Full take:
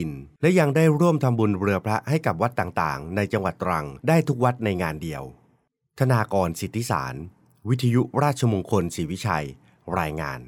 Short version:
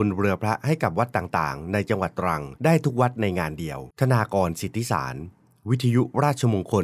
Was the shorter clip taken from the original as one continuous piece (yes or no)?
no